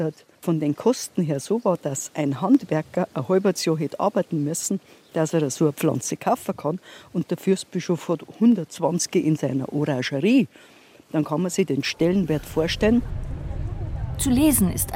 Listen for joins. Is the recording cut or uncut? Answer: uncut